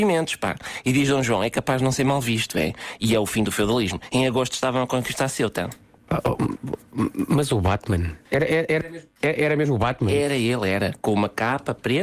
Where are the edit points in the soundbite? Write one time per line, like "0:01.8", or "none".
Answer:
0:08.2